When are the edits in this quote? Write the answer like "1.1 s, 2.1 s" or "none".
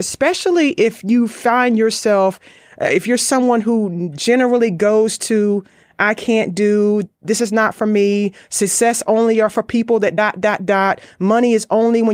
none